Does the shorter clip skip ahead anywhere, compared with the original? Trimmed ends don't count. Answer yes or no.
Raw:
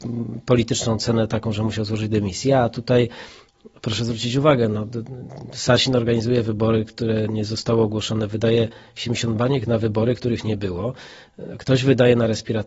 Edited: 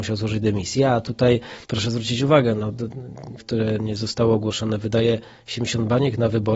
yes